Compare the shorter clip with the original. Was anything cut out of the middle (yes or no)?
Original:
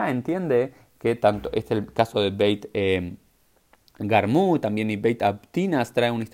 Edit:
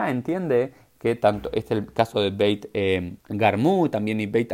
yes